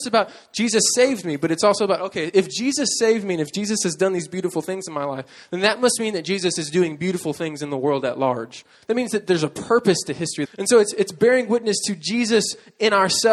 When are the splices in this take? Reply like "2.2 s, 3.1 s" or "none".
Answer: 8.8 s, 10.5 s

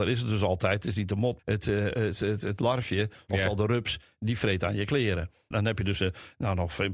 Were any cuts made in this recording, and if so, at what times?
1.4 s, 5.5 s

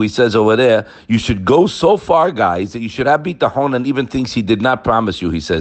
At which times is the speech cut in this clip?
none

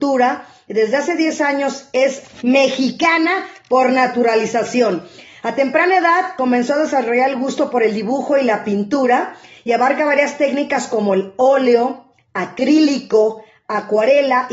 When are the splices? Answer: none

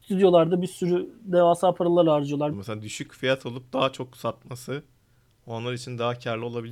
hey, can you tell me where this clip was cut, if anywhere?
2.5 s

